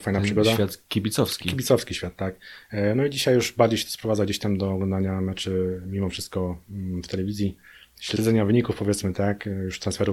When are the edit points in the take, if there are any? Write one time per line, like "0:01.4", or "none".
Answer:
none